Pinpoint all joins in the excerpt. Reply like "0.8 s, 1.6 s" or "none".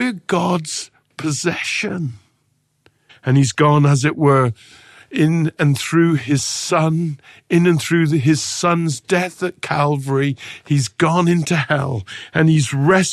3.1 s

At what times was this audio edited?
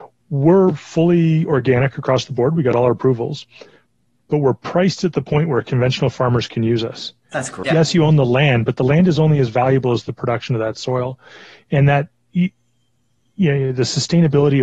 7.6 s

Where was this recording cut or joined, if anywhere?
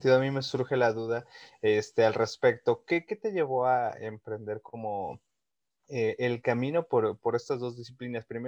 none

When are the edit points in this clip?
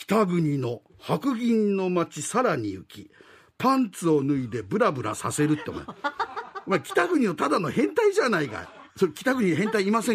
8.9 s

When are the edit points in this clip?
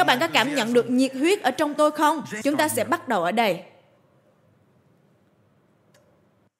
2.4 s

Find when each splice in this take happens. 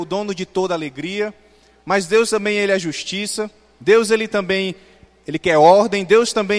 none

